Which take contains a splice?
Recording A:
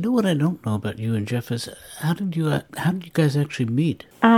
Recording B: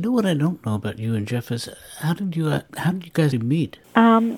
B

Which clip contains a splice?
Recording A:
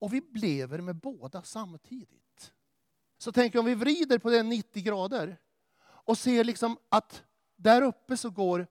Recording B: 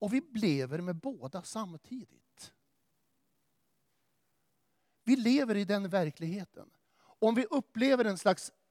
A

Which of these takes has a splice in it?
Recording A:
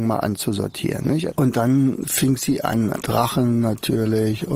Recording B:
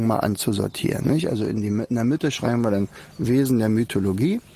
A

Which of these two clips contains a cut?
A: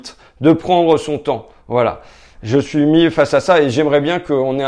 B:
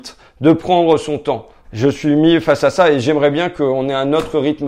B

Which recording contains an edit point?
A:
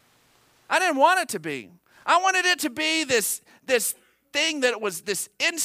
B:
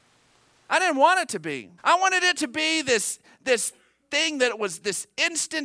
B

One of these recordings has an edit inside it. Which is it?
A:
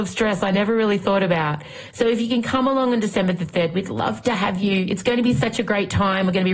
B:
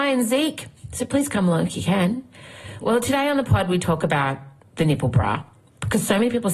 B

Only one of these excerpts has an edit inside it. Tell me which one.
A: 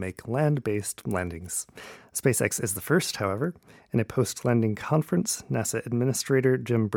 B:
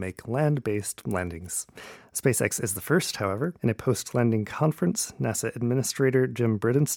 B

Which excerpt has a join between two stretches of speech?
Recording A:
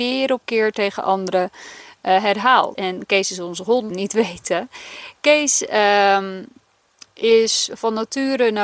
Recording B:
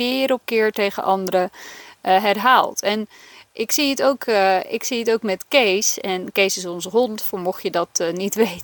A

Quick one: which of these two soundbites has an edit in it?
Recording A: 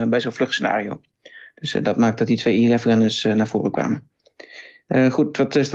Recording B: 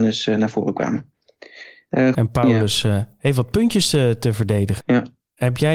B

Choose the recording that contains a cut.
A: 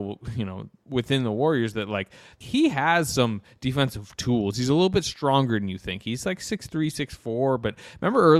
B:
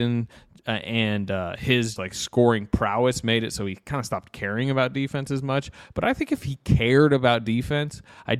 B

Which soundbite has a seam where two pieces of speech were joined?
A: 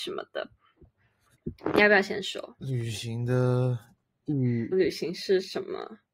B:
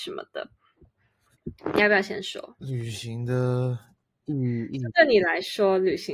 A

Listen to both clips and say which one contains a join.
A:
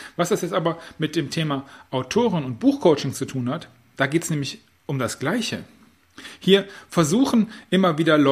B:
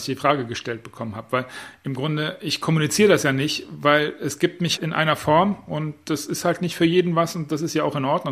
B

